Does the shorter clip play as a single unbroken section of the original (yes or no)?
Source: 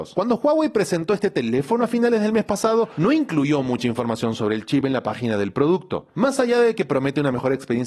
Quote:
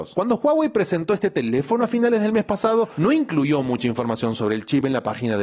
yes